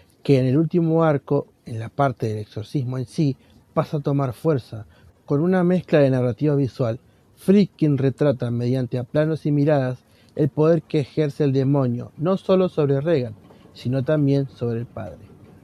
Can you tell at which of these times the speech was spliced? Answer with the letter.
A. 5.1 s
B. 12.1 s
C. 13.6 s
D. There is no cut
D